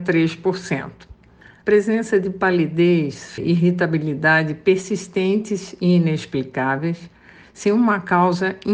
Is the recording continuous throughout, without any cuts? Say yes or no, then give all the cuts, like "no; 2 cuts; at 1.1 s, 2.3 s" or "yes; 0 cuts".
no; 3 cuts; at 1.6 s, 3.4 s, 7.4 s